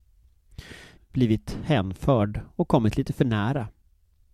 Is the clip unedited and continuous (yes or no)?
no